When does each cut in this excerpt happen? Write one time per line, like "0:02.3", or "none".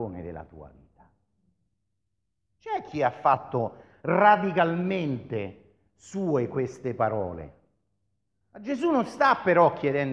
0:02.5